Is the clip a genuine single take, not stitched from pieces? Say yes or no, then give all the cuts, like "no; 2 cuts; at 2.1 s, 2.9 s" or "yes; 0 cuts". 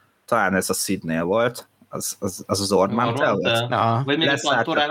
yes; 0 cuts